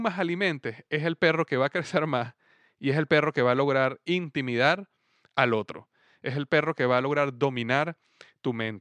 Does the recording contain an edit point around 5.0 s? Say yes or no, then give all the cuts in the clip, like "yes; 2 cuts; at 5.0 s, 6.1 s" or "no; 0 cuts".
no; 0 cuts